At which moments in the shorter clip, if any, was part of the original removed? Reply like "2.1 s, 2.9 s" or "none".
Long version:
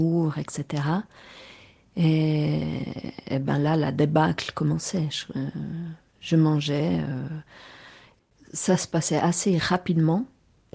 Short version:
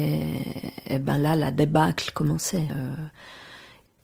2.7 s